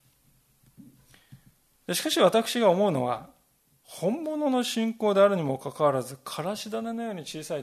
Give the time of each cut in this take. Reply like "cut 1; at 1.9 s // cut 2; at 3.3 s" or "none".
none